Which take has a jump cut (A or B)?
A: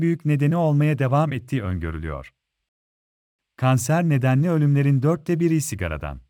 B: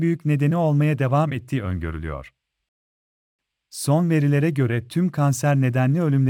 A